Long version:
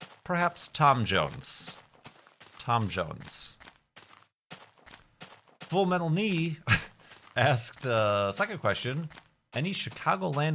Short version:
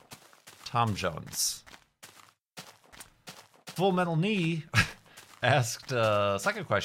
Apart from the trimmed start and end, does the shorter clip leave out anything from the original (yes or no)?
no